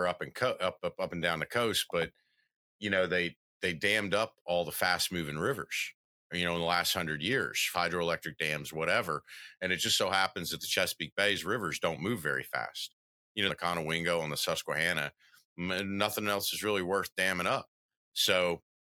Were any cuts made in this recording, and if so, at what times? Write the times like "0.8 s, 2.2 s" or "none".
7.7 s, 13.5 s